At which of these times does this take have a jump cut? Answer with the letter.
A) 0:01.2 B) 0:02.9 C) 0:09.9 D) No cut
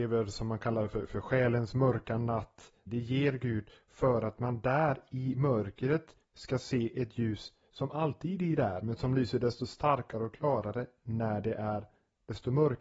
B